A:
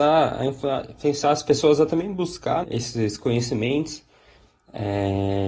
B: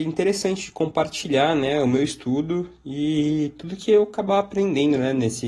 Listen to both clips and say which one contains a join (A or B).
A